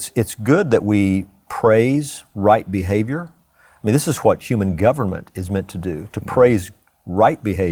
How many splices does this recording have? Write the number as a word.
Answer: zero